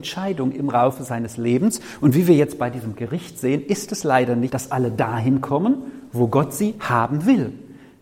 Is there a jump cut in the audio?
yes; 1 cut; at 4.5 s

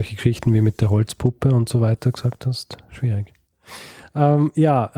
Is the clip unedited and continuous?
yes; 0 cuts

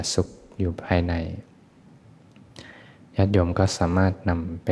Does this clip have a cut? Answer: no; 0 cuts

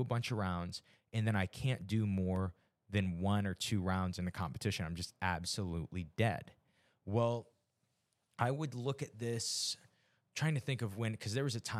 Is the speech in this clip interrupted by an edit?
no; 0 cuts

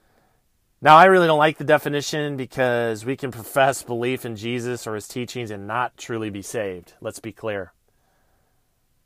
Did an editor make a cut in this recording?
no; 0 cuts

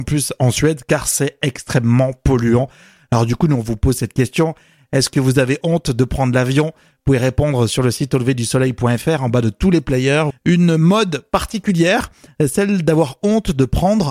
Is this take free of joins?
no; 1 cut; at 10.3 s

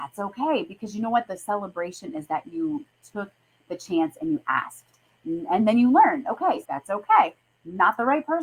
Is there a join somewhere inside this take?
yes; 1 cut; at 6.6 s

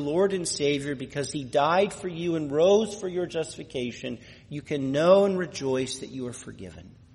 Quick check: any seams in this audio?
no; 0 cuts

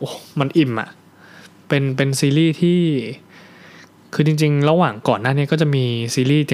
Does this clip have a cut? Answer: no; 0 cuts

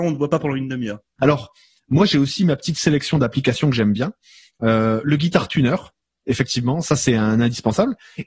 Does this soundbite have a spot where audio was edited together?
yes; 1 cut; at 1.2 s

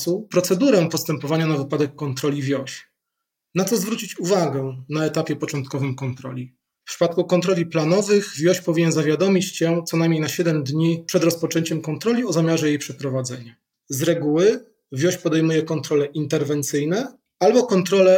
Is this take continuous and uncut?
no; 3 cuts; at 3.4 s, 6.8 s, 13.7 s

